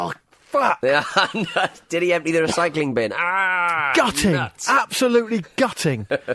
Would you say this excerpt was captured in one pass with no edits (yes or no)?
yes